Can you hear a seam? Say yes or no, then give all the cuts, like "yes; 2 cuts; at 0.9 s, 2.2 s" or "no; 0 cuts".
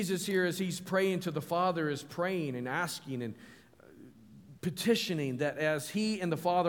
yes; 1 cut; at 4.6 s